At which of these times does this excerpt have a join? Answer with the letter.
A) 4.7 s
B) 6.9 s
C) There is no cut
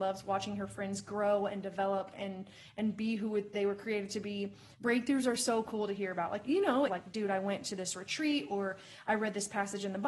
B